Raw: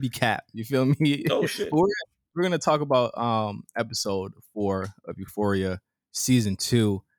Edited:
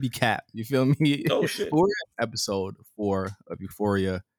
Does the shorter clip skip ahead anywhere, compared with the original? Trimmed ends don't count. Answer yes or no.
yes